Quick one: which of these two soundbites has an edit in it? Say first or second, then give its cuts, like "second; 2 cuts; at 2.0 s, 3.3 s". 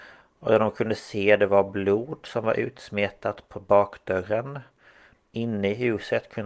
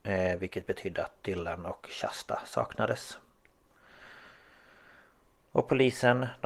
first; 1 cut; at 5.1 s